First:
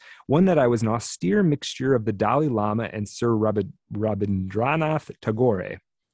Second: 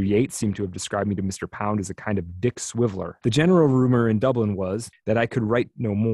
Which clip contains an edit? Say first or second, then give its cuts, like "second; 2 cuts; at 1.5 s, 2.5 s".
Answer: second; 2 cuts; at 3.2 s, 4.9 s